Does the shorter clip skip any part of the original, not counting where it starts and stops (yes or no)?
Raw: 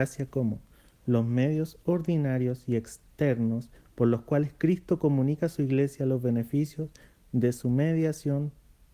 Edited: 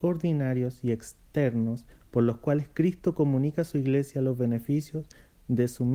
no